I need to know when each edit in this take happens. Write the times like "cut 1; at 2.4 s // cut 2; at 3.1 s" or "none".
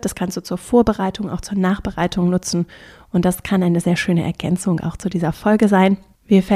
none